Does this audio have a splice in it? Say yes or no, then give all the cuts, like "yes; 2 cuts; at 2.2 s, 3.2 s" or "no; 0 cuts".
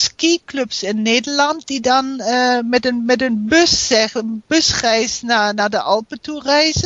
no; 0 cuts